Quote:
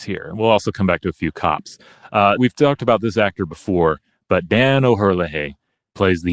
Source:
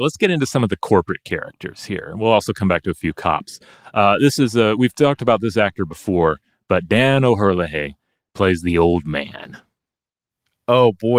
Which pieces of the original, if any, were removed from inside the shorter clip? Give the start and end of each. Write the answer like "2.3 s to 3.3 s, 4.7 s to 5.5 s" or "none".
4.2 s to 4.8 s